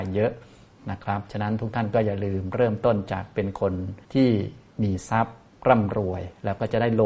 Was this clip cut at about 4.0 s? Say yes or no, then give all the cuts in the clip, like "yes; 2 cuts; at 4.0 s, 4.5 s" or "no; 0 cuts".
yes; 1 cut; at 4.0 s